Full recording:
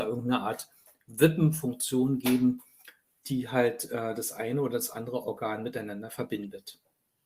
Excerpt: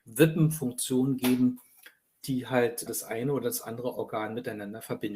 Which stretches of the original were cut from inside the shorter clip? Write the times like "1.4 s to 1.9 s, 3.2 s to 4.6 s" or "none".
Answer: 3.9 s to 4.1 s